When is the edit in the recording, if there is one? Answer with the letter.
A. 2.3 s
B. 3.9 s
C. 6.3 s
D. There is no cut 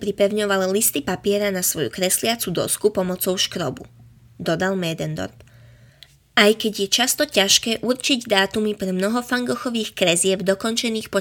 D